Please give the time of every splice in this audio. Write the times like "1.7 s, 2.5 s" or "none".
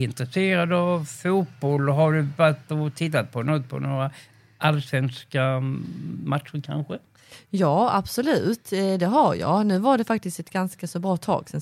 none